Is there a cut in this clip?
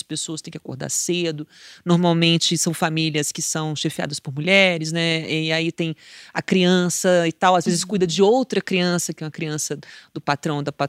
no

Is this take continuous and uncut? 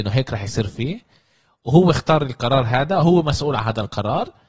yes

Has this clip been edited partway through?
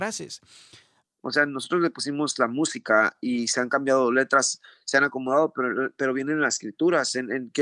yes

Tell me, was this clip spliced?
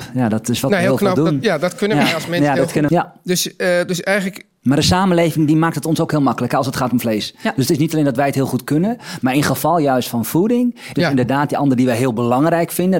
yes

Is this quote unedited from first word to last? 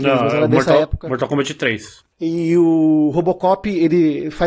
yes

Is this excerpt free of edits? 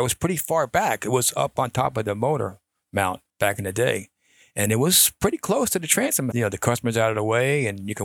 no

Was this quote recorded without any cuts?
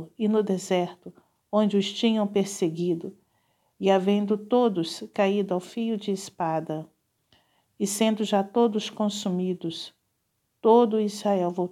yes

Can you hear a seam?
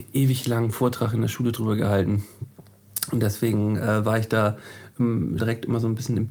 yes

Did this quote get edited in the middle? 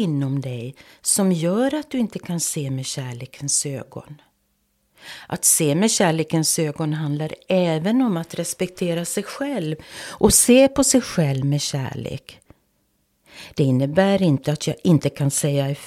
no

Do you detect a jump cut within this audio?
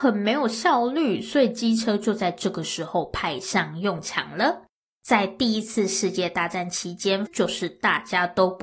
yes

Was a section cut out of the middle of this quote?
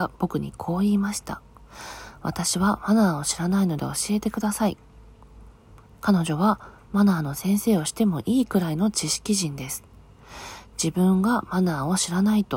no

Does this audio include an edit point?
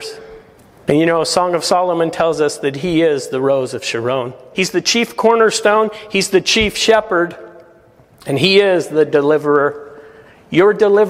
yes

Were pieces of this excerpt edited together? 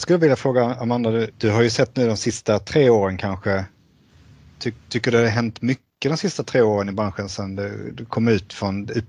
yes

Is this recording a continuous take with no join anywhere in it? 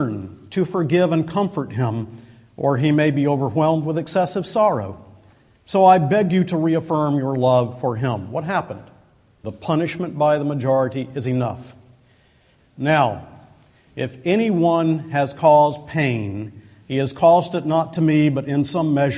no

